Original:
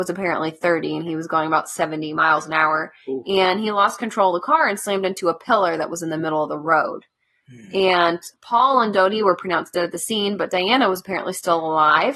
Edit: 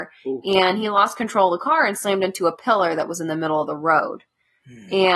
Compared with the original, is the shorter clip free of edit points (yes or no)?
yes